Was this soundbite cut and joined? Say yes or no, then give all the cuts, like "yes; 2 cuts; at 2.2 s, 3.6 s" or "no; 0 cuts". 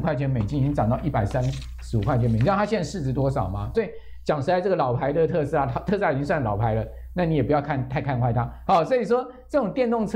yes; 2 cuts; at 3.7 s, 8.7 s